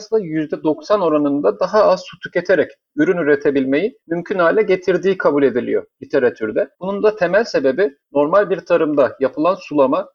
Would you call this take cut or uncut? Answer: cut